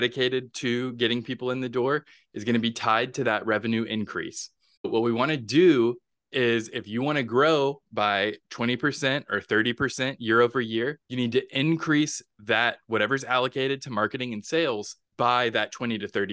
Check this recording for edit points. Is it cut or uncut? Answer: cut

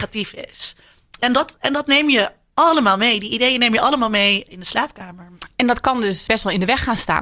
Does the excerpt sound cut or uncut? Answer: cut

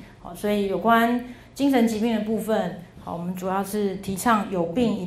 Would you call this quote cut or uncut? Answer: uncut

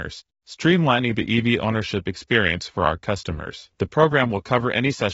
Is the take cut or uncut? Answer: uncut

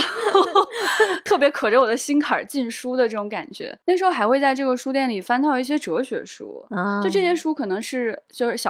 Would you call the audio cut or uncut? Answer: uncut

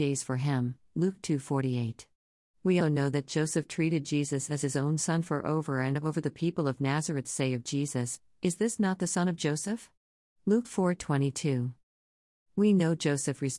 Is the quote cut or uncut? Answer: cut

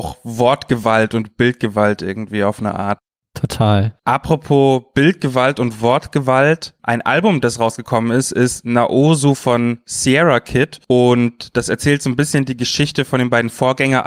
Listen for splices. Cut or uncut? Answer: uncut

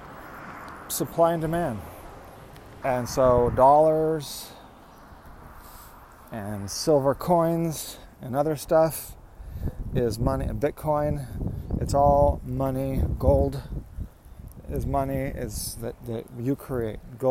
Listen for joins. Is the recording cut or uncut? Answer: cut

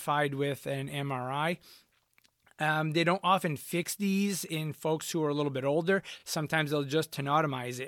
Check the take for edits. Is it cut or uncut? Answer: uncut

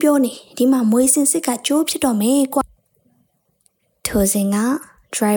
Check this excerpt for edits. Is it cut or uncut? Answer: uncut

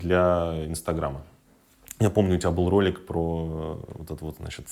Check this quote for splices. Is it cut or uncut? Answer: uncut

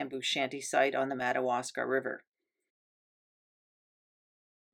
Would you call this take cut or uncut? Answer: uncut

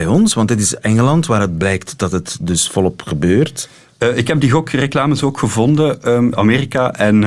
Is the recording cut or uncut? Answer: cut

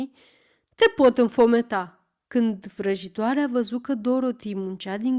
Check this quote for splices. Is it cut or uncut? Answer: cut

